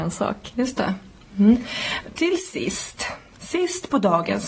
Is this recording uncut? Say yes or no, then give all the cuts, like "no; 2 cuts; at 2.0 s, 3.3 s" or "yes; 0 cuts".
yes; 0 cuts